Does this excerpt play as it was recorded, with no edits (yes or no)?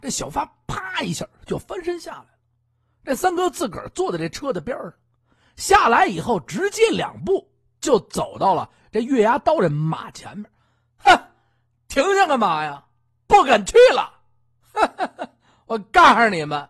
yes